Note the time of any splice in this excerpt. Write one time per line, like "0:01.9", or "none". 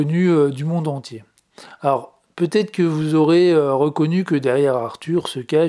none